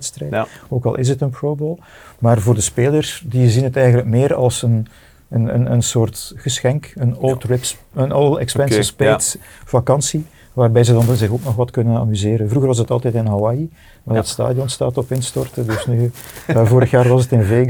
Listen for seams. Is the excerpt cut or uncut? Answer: uncut